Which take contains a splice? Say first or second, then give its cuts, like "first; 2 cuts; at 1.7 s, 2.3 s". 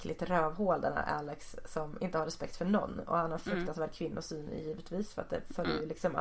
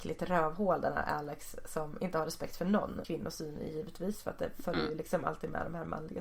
second; 1 cut; at 3.0 s